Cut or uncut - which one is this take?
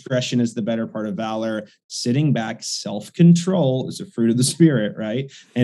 uncut